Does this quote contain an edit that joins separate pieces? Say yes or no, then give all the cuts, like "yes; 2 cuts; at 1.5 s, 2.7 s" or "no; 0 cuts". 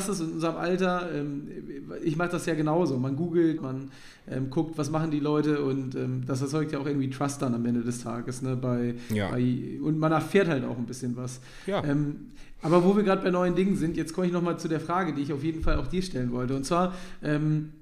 yes; 1 cut; at 3.6 s